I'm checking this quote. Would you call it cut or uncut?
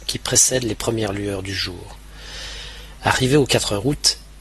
uncut